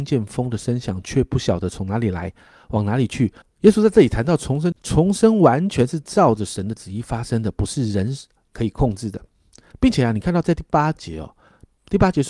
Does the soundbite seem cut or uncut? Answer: cut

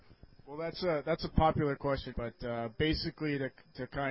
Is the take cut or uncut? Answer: cut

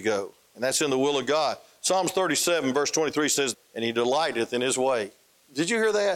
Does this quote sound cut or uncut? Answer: cut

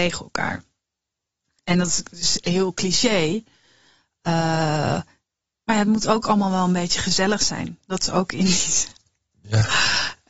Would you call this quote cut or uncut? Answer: uncut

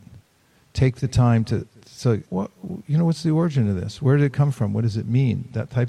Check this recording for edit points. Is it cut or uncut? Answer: cut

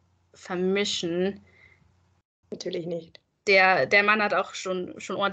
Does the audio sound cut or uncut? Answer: cut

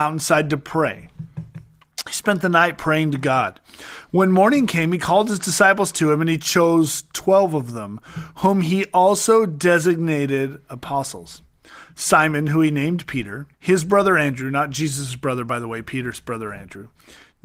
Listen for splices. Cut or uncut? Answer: cut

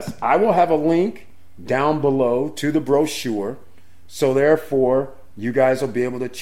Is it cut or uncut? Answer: uncut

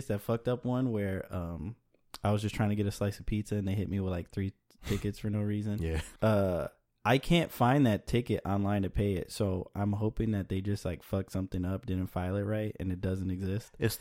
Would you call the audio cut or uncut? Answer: cut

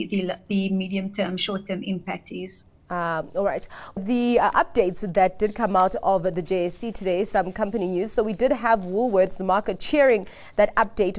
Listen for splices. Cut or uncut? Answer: cut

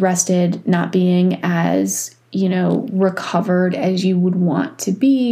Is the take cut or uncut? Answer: uncut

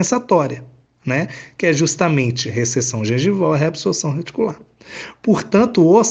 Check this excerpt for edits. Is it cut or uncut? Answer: uncut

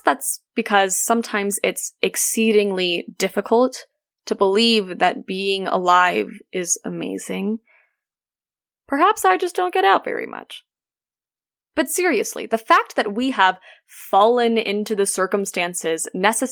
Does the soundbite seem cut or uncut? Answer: uncut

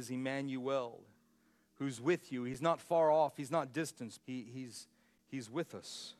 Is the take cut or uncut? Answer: cut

